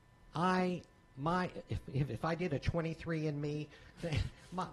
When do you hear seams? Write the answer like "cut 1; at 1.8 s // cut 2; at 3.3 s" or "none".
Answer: none